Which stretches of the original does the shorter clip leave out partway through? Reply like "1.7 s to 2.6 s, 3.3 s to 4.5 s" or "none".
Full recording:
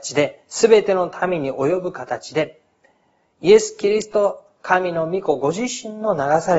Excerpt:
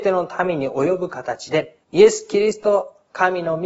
2.7 s to 3.3 s